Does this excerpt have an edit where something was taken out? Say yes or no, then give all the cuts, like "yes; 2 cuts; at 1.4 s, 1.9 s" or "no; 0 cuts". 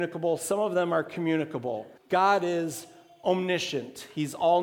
yes; 1 cut; at 2.0 s